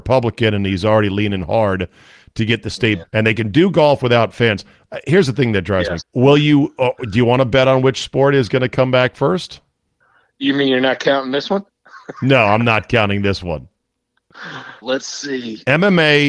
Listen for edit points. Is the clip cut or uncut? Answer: cut